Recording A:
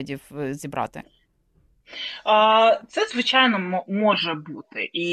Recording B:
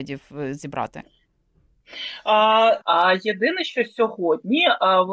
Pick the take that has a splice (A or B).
B